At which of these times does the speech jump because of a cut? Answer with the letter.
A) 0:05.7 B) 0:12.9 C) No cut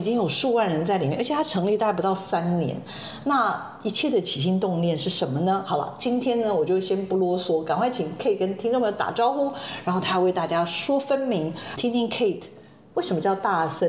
B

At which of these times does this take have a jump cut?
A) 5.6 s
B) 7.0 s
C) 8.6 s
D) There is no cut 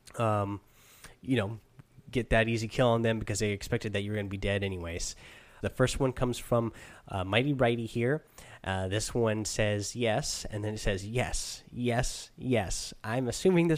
A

